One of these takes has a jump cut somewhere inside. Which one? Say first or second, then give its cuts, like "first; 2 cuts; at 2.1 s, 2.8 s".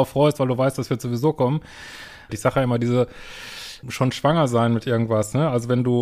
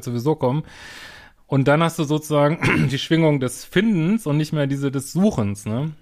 first; 2 cuts; at 2.3 s, 3.8 s